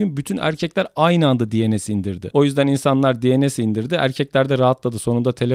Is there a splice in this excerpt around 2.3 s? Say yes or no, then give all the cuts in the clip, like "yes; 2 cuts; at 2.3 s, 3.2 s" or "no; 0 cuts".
yes; 1 cut; at 2.3 s